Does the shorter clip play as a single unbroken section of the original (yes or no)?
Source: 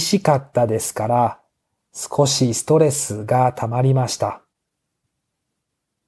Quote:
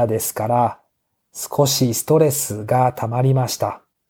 yes